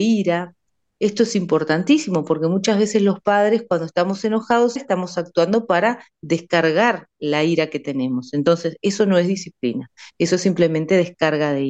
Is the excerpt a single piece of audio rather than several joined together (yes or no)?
no